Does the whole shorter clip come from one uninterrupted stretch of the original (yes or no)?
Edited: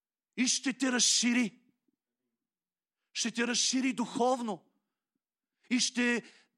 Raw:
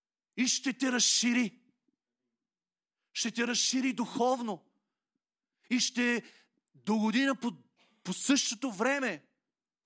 yes